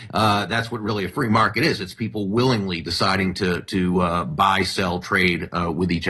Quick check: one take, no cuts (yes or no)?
yes